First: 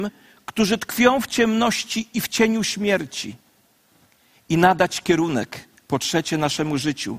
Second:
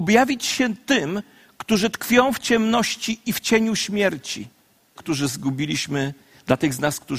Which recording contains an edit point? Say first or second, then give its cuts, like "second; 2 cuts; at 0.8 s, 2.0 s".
second; 1 cut; at 5.0 s